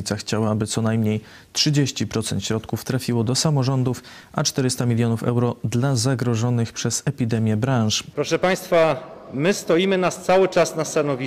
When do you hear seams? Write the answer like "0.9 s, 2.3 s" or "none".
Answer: 8.1 s